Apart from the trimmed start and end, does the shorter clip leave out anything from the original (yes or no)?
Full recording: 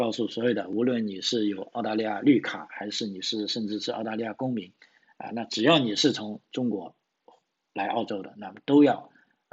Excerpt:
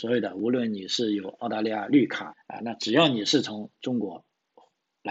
yes